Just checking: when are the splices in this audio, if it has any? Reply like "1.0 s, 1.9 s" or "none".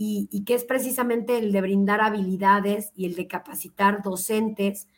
none